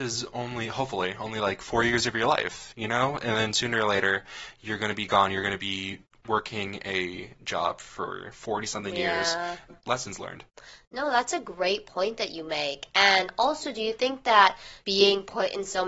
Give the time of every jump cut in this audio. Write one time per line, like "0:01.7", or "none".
0:09.7
0:14.8